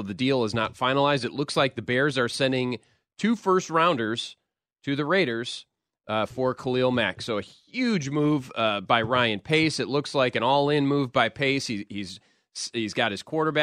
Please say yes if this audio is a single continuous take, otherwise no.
yes